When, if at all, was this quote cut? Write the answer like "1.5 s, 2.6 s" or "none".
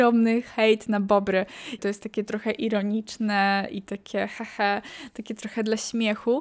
1.8 s